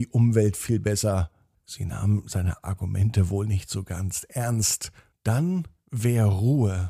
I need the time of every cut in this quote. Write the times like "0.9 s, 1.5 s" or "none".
1.5 s, 5.1 s